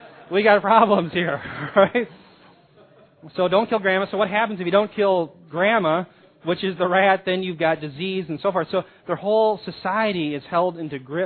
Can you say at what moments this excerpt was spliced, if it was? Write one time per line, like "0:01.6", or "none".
none